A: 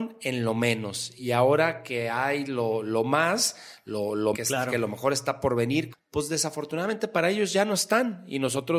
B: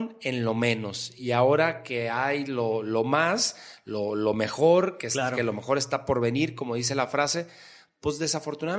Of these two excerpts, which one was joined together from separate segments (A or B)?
A